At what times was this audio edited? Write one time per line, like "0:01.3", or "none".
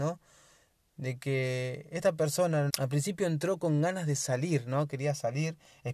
0:02.7